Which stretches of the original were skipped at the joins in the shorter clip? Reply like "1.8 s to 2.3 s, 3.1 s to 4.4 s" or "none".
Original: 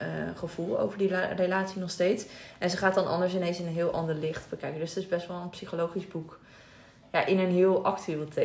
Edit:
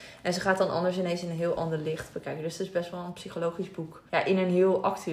6.4 s to 7.1 s